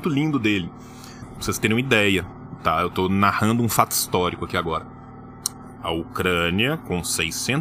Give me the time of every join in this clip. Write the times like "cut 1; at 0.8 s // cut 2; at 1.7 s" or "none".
cut 1; at 1.2 s // cut 2; at 5.8 s